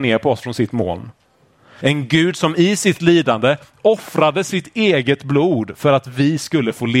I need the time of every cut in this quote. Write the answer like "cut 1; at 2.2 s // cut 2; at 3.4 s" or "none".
cut 1; at 1.8 s